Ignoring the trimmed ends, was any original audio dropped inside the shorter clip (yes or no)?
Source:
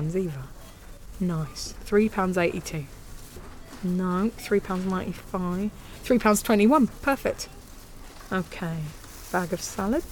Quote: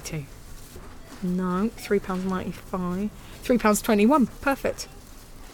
no